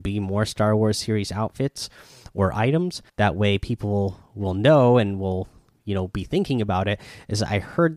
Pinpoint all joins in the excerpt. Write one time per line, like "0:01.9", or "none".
0:03.1